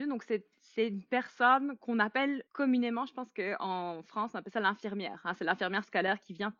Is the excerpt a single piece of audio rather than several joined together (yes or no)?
no